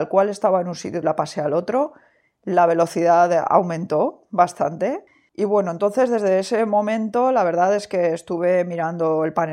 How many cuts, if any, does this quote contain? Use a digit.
1